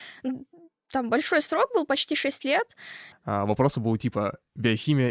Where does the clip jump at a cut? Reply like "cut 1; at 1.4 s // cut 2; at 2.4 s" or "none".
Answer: cut 1; at 3.1 s